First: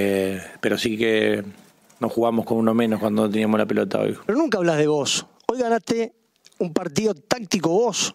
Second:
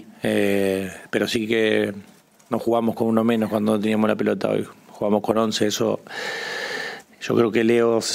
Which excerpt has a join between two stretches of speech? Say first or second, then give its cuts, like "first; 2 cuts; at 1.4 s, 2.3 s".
first; 1 cut; at 4.2 s